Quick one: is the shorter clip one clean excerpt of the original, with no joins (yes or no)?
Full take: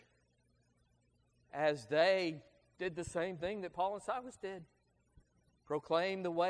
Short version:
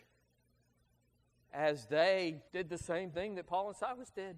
no